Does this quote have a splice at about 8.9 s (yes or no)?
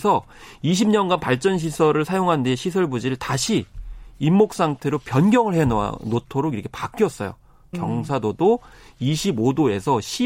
no